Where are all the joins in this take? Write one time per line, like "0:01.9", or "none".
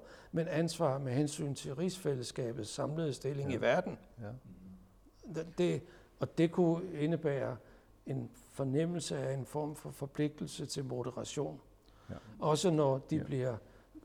0:05.5